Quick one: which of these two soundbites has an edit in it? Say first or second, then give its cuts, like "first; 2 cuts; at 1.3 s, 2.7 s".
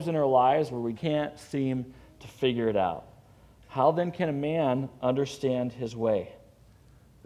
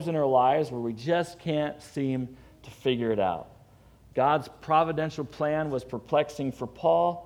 first; 2 cuts; at 0.9 s, 3.6 s